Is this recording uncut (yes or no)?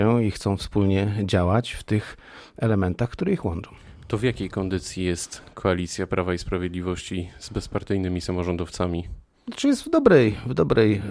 yes